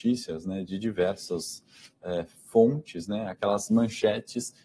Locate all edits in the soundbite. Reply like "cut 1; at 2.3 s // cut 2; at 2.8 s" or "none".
none